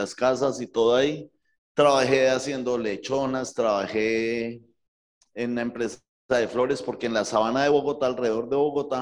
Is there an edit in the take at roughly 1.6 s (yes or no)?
yes